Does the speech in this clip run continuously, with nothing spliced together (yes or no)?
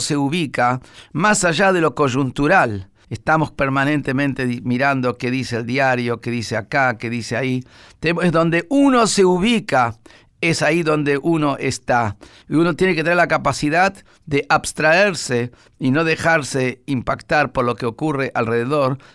yes